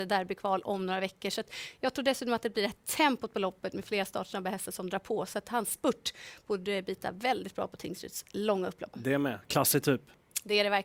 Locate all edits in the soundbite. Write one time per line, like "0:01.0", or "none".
0:08.9